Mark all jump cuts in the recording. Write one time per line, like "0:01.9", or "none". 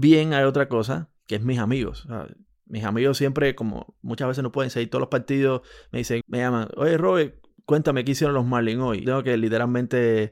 0:06.2
0:09.0